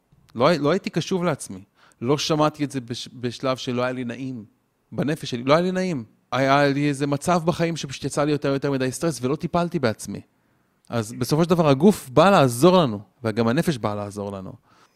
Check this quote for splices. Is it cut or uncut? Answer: cut